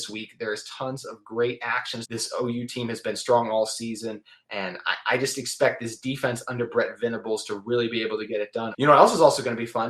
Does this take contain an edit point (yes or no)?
yes